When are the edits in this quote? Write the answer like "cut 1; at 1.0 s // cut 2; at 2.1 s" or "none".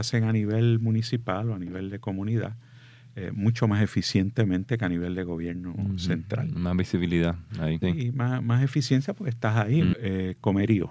cut 1; at 7.8 s // cut 2; at 9.9 s